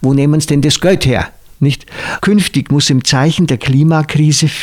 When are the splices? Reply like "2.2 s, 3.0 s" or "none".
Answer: 2.2 s